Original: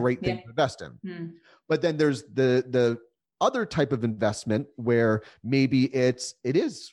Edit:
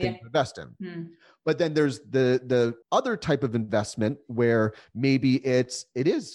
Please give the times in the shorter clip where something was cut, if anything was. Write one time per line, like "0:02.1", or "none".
0:02.8